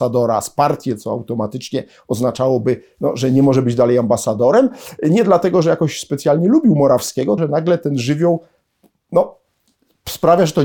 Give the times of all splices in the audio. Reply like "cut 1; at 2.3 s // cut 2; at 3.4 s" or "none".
cut 1; at 7.4 s